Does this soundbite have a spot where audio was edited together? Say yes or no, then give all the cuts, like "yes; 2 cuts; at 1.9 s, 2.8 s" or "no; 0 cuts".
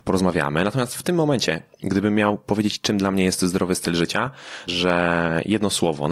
yes; 1 cut; at 4.7 s